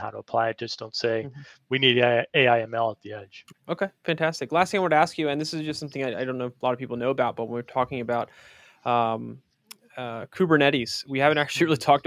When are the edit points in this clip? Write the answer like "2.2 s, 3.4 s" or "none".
3.5 s